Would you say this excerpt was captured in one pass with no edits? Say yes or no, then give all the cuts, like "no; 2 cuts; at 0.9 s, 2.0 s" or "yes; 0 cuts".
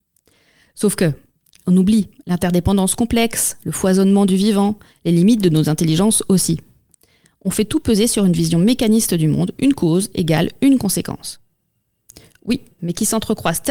no; 1 cut; at 12.8 s